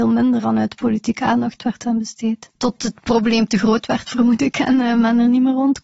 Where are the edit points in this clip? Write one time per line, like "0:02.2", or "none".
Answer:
0:02.6